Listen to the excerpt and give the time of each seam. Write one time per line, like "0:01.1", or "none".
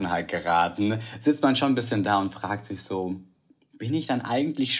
none